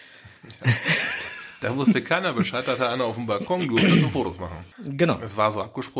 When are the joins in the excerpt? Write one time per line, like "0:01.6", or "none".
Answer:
0:04.7